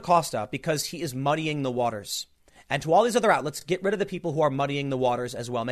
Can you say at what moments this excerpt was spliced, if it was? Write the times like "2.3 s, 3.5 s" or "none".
none